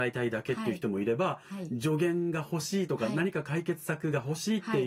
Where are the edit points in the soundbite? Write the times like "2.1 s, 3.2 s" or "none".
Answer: none